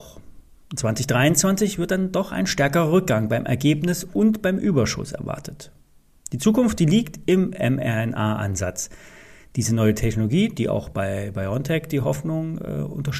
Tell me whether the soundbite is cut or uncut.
uncut